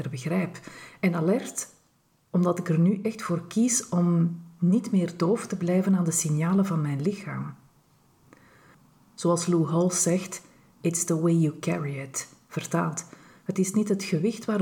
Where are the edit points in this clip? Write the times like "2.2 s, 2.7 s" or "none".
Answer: 10.8 s